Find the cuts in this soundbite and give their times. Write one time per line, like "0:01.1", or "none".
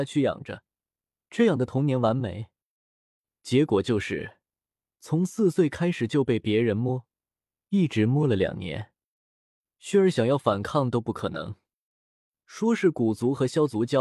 none